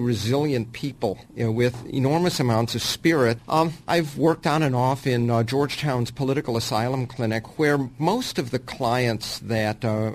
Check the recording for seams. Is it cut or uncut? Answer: cut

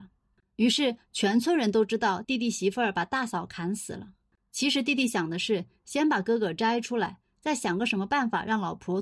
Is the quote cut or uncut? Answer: uncut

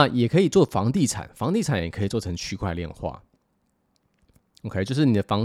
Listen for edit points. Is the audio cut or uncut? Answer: uncut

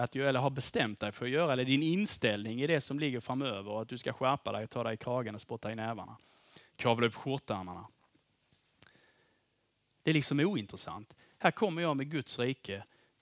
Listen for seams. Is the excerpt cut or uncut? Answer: uncut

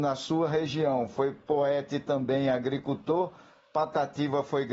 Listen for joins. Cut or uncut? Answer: uncut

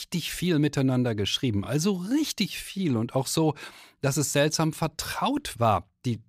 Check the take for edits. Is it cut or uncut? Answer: uncut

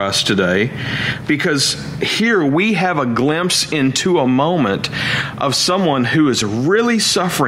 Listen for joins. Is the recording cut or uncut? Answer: uncut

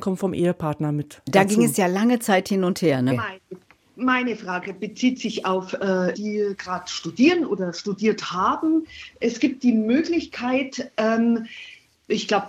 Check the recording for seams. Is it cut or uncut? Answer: cut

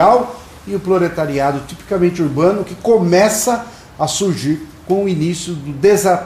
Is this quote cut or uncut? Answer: uncut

